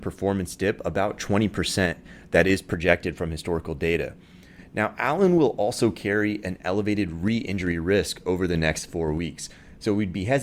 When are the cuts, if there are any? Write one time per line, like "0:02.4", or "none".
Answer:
none